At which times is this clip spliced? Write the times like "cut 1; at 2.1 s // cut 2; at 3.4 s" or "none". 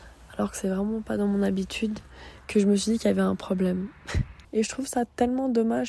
cut 1; at 2.4 s // cut 2; at 4.4 s